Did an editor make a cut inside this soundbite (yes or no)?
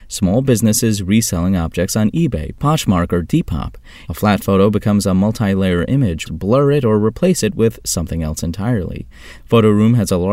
yes